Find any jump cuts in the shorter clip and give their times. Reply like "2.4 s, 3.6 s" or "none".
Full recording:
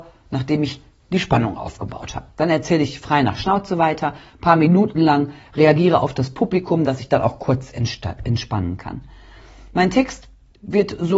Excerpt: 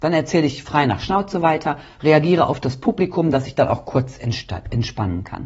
2.0 s